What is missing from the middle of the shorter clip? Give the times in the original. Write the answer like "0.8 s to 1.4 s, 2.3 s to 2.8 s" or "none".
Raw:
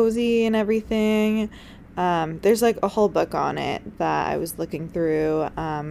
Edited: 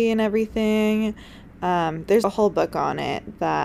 2.6 s to 2.8 s